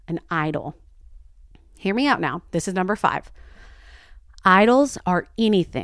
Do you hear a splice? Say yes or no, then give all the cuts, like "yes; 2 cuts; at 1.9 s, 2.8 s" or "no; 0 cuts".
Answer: no; 0 cuts